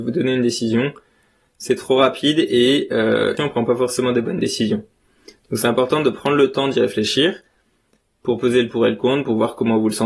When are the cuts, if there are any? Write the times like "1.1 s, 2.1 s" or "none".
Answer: 3.4 s